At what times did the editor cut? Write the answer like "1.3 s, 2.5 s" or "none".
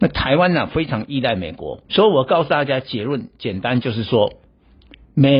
1.8 s